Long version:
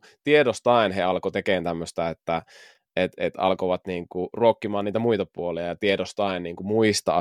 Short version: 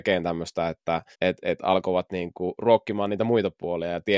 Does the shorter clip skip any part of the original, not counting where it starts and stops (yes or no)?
yes